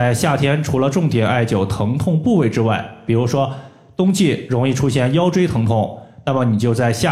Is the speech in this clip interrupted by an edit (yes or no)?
no